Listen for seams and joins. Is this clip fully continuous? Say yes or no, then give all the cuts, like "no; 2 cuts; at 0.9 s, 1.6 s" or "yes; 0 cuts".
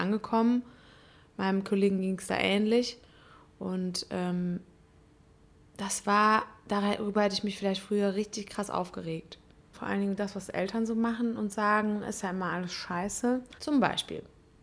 no; 2 cuts; at 9.7 s, 13.6 s